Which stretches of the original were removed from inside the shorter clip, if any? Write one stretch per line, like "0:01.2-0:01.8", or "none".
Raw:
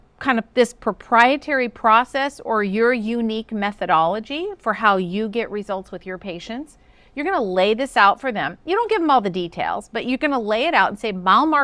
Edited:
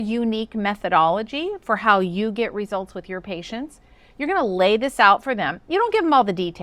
none